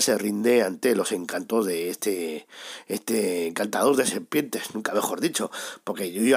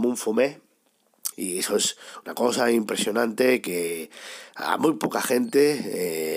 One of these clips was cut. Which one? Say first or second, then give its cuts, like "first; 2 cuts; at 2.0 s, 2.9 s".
second; 1 cut; at 1.3 s